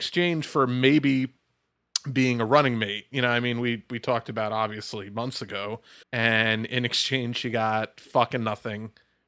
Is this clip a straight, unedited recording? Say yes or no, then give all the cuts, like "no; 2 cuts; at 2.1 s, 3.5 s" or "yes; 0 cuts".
no; 1 cut; at 6.0 s